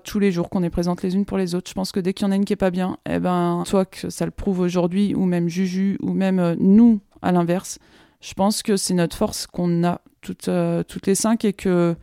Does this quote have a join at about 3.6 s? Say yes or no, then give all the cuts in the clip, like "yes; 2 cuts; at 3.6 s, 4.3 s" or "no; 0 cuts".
yes; 1 cut; at 3.6 s